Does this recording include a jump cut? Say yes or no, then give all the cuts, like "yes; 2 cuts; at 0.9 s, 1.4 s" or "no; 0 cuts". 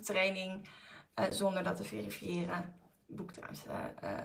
no; 0 cuts